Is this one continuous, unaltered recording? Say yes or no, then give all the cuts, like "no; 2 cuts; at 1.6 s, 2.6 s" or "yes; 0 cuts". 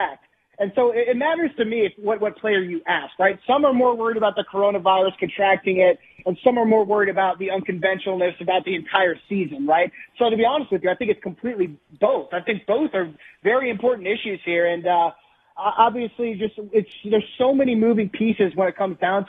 yes; 0 cuts